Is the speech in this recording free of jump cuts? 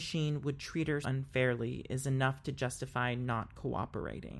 no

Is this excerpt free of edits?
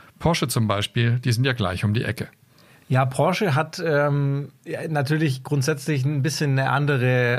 yes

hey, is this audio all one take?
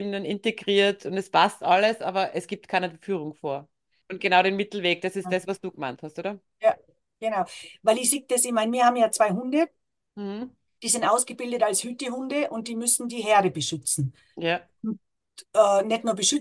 no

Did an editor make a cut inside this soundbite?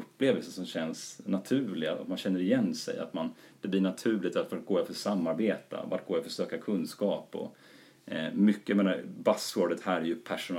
no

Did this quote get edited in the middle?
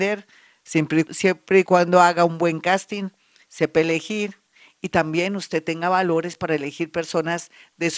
yes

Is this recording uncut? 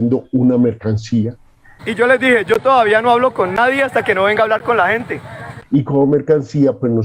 no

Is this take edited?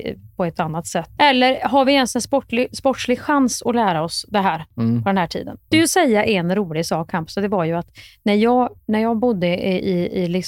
yes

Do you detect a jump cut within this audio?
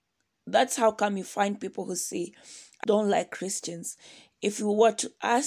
yes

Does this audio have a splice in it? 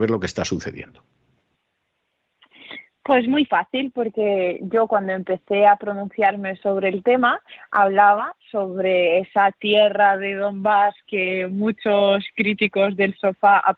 no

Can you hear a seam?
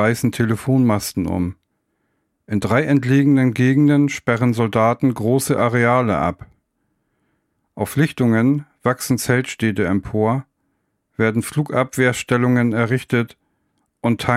no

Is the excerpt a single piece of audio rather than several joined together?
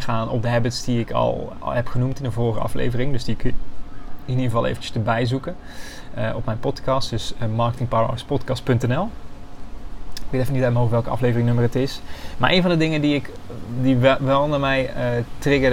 yes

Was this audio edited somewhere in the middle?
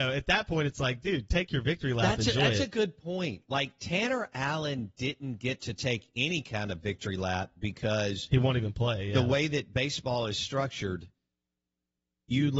no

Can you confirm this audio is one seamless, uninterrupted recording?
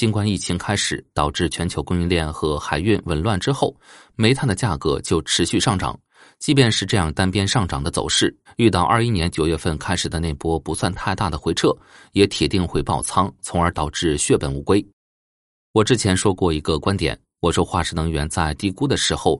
no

